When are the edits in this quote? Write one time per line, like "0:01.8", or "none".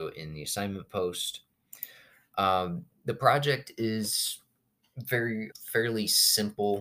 0:05.5